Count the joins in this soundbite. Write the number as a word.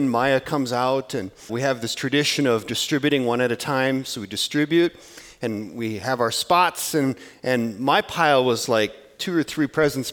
one